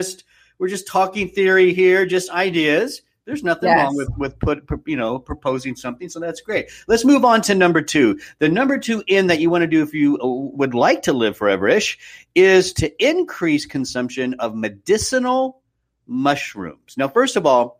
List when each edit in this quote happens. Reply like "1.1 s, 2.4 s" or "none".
none